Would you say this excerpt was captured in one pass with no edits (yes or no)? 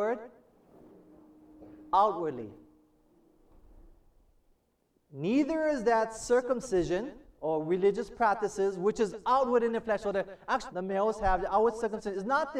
no